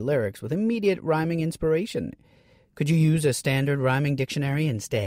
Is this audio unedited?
yes; 0 cuts

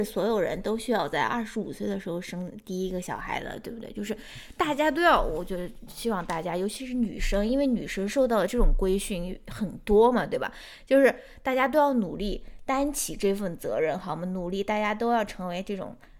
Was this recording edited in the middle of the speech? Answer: no; 0 cuts

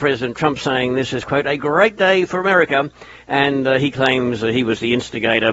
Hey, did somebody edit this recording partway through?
no; 0 cuts

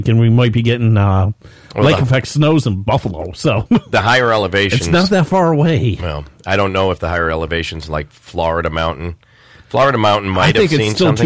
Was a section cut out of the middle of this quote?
no; 0 cuts

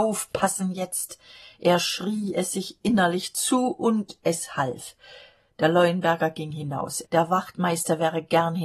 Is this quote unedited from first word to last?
no; 1 cut; at 7.0 s

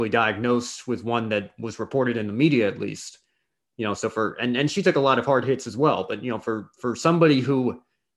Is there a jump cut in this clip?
no; 0 cuts

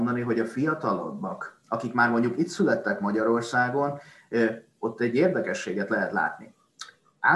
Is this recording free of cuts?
yes; 0 cuts

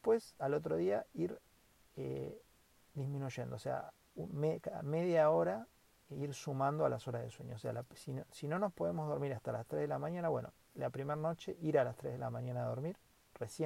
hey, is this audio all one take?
yes; 0 cuts

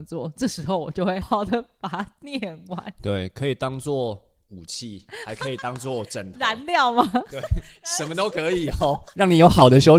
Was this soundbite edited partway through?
yes; 1 cut; at 1.2 s

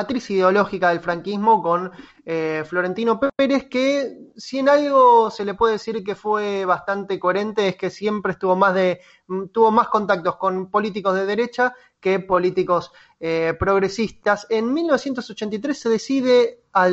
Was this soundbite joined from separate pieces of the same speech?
no; 0 cuts

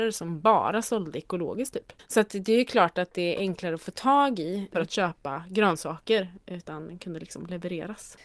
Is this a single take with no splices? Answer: no; 1 cut; at 4.7 s

